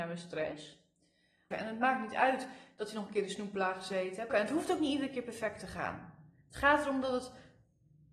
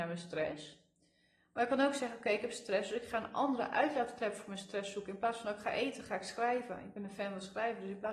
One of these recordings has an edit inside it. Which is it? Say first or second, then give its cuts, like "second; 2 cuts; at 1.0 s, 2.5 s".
first; 2 cuts; at 1.5 s, 4.3 s